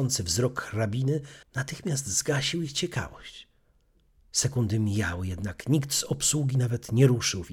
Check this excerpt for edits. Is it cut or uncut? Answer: cut